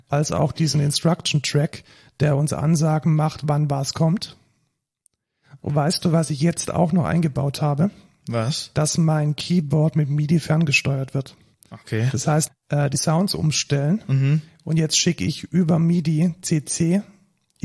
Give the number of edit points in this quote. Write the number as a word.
one